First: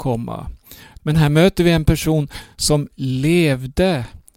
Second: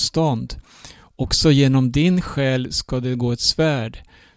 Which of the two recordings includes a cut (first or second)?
first